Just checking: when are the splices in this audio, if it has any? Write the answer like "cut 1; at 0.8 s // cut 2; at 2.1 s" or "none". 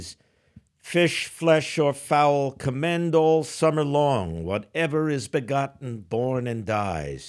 none